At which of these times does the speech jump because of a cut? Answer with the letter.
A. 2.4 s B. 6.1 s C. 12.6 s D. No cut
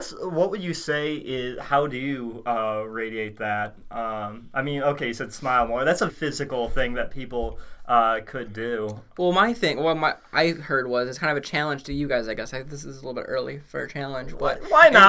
B